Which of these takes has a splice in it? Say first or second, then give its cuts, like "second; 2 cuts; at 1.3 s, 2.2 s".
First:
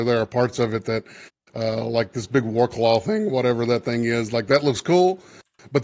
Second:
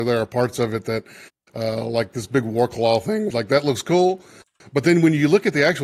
second; 1 cut; at 3.3 s